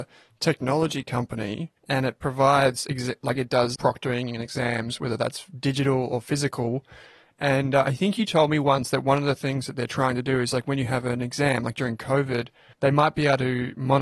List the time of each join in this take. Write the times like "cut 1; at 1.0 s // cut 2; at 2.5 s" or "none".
cut 1; at 1.8 s // cut 2; at 3.8 s // cut 3; at 12.7 s